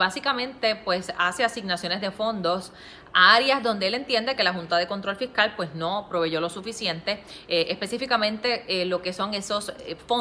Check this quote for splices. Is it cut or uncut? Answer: uncut